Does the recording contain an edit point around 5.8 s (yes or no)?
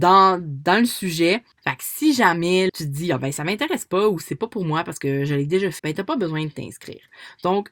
yes